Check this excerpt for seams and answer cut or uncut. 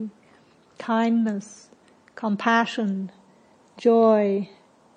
uncut